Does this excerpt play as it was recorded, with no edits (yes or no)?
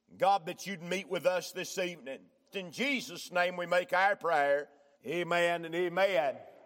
no